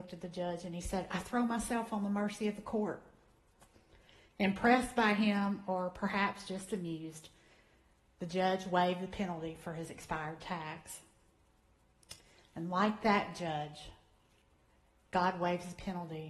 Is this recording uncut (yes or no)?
yes